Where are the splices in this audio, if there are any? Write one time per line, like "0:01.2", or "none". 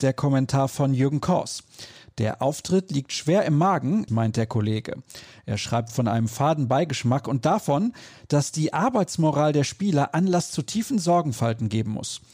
0:04.1